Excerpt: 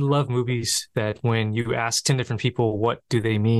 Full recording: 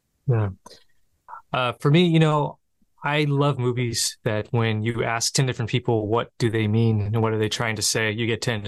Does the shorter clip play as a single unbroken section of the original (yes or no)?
yes